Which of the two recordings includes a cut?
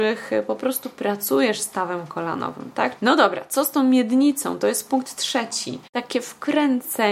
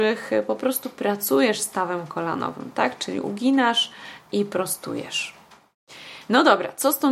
first; 2 cuts; at 3.0 s, 5.9 s

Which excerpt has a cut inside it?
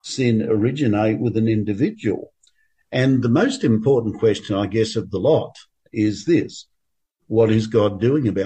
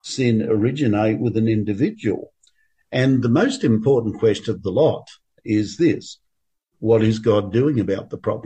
second; 1 cut; at 4.5 s

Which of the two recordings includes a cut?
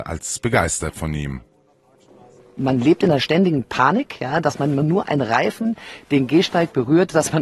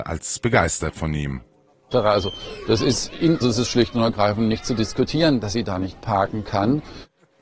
second; 2 cuts; at 1.9 s, 3.4 s

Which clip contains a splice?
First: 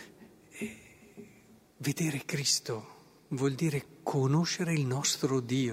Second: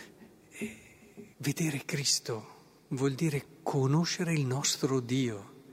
second; 1 cut; at 1.3 s

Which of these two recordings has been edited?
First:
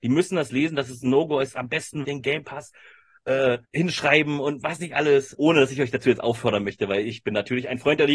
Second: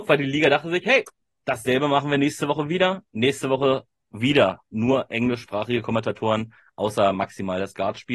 first; 3 cuts; at 2.0 s, 3.6 s, 5.3 s

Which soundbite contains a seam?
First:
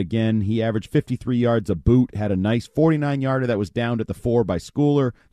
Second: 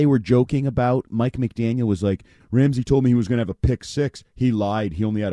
second; 1 cut; at 2.4 s

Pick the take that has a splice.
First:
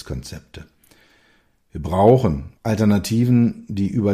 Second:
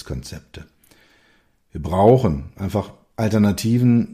first; 1 cut; at 2.5 s

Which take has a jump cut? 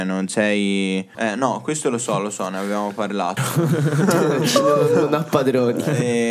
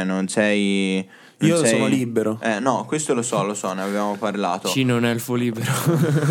first; 2 cuts; at 1.1 s, 3.4 s

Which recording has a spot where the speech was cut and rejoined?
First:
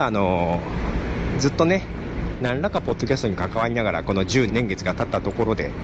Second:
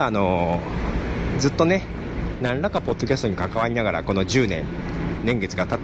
first; 1 cut; at 4.5 s

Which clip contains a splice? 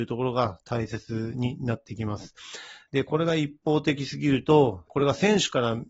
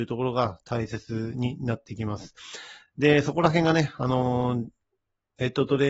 first; 2 cuts; at 2.9 s, 4.9 s

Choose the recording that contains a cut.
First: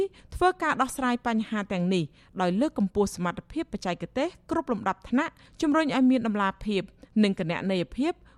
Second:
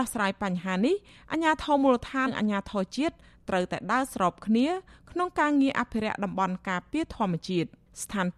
second; 1 cut; at 2.3 s

